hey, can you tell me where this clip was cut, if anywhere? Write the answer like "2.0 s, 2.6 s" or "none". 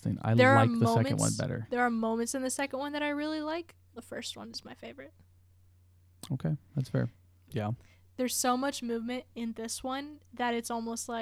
4.0 s, 7.5 s